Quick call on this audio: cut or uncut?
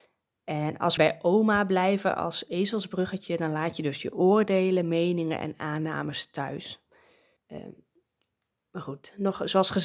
cut